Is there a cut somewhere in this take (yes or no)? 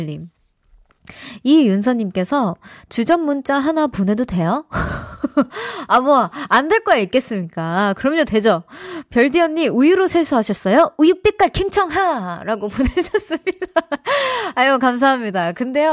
no